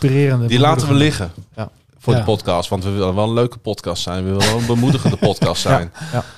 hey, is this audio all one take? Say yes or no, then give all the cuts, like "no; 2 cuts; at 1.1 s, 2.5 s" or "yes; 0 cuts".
yes; 0 cuts